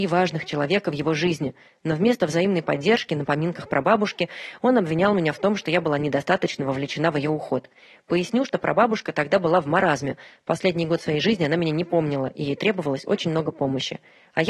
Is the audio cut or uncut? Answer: uncut